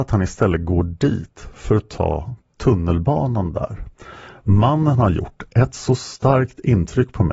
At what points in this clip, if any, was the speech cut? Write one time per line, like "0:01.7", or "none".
none